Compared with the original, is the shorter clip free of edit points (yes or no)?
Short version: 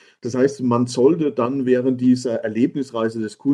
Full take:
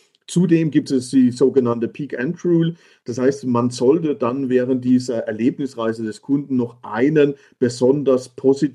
yes